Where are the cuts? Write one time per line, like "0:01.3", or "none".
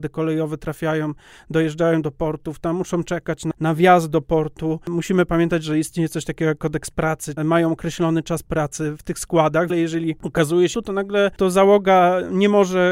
0:07.4
0:09.7
0:10.7